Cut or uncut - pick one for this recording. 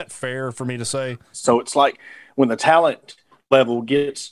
cut